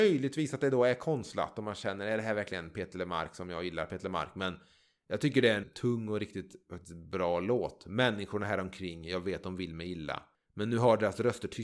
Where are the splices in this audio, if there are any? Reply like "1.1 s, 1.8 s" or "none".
5.6 s